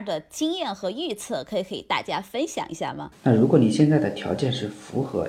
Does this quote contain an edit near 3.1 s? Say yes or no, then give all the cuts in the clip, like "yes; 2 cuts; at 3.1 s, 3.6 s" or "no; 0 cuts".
yes; 1 cut; at 3.1 s